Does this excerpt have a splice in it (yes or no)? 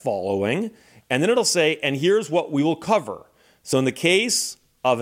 no